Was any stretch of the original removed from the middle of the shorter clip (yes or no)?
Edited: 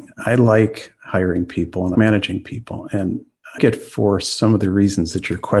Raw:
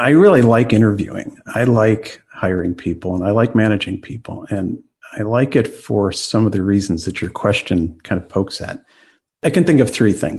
yes